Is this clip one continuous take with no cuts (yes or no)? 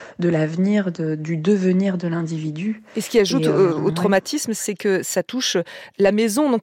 yes